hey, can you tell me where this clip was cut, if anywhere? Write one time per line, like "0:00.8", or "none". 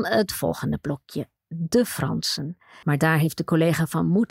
0:02.8